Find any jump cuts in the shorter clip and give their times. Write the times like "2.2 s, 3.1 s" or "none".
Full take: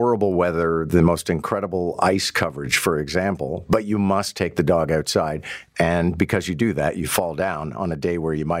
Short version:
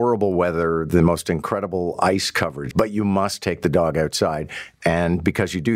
2.7 s